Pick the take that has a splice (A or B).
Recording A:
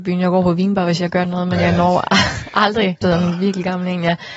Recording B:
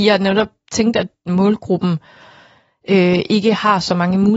A